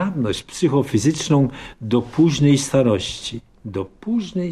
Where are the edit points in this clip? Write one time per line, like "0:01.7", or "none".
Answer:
none